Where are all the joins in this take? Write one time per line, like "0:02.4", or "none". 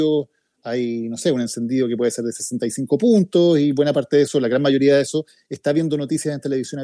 none